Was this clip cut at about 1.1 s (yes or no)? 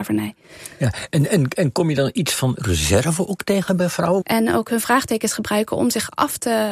no